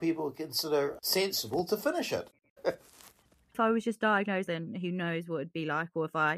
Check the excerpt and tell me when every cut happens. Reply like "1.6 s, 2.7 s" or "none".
2.6 s, 4.5 s